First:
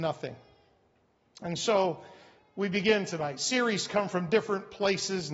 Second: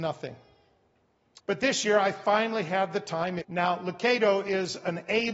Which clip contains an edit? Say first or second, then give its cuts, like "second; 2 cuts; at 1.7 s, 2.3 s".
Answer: second; 2 cuts; at 1.4 s, 3.4 s